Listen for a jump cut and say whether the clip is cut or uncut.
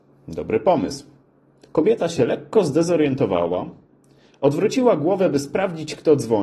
cut